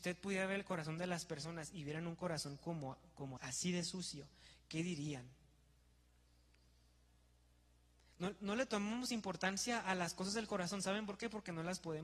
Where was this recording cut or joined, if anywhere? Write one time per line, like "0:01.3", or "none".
0:03.4